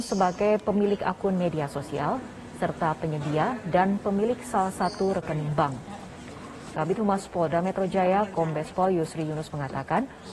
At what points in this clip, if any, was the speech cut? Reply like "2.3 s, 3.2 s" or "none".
6.7 s